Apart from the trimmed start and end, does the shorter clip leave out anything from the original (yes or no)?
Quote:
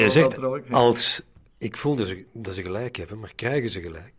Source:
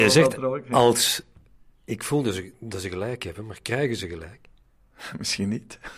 yes